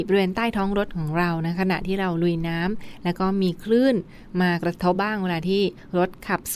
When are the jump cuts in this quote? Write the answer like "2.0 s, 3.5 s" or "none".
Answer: 4.9 s